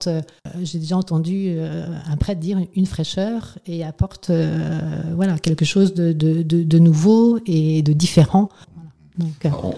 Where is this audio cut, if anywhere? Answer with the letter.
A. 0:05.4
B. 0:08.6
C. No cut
B